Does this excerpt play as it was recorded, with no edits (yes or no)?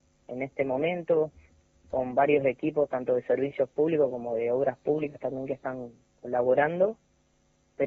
yes